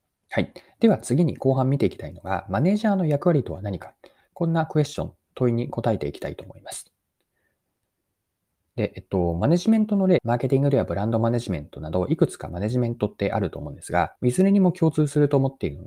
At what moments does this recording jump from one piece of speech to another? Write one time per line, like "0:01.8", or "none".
0:10.2
0:14.2